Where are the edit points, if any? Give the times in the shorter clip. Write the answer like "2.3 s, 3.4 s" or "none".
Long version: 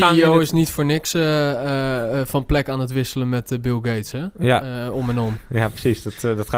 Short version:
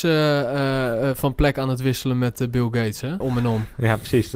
3.2 s